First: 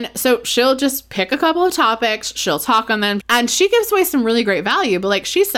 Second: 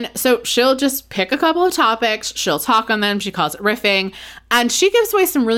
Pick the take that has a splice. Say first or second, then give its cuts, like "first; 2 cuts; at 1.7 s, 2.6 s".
first; 1 cut; at 3.2 s